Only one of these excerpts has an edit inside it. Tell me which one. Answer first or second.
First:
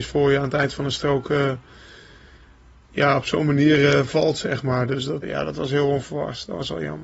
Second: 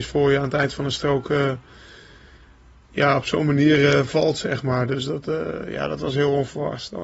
first